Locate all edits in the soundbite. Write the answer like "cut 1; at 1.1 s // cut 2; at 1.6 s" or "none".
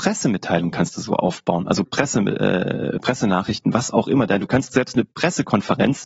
none